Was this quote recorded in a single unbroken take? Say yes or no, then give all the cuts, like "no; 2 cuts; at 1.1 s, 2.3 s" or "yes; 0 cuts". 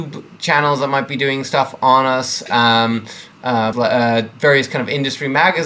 no; 1 cut; at 3.7 s